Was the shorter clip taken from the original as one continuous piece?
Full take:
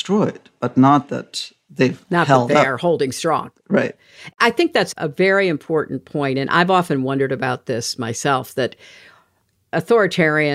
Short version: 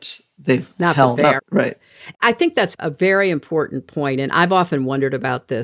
no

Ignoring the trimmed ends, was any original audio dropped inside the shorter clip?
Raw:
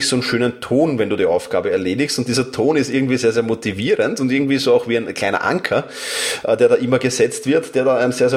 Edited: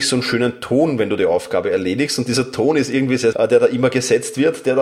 yes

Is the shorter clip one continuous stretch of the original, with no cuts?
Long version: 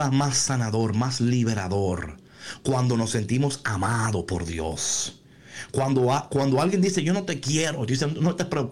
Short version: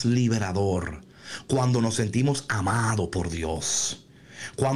yes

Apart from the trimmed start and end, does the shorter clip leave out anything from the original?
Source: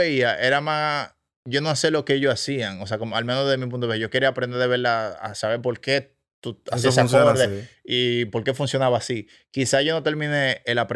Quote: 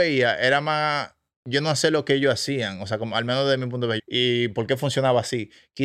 yes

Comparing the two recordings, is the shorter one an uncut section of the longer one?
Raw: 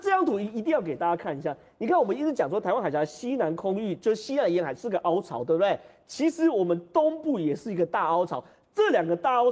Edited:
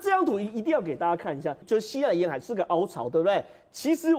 no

